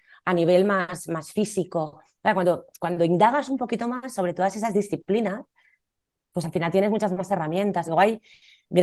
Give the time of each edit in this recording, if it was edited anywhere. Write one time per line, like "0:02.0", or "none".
0:07.9